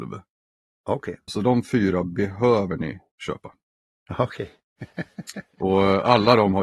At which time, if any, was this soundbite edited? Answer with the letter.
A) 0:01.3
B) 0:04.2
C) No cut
A